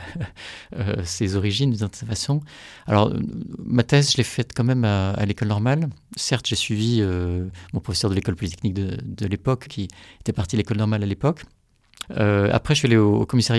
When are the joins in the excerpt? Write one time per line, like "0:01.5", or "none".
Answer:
0:09.7
0:12.0